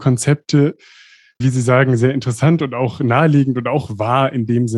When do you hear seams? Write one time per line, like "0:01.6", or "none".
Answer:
0:01.4